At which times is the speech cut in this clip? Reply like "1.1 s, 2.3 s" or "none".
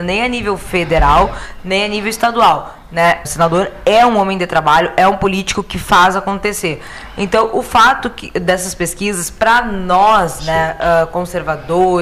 3.2 s